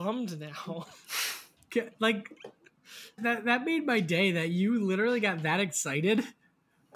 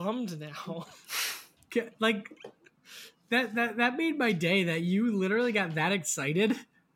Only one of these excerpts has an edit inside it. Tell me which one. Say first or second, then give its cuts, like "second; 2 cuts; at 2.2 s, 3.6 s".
first; 1 cut; at 3.2 s